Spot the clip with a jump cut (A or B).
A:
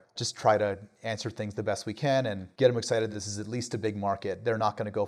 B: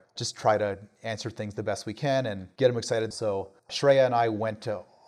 B